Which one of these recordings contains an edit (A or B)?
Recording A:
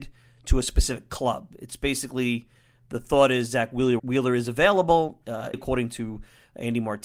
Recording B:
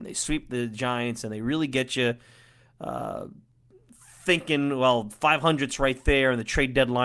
A